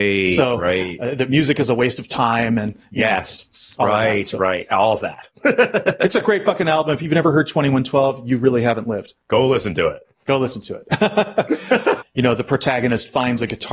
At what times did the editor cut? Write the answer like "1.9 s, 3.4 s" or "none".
9.2 s, 12.0 s